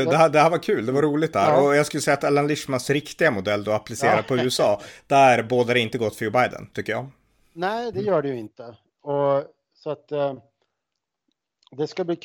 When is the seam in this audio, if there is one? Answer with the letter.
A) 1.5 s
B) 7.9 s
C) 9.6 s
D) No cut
B